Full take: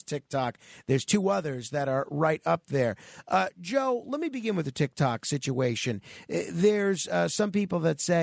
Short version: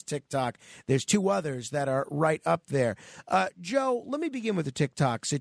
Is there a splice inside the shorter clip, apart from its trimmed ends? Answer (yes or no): no